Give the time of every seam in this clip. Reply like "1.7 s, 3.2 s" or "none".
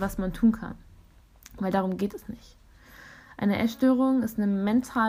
none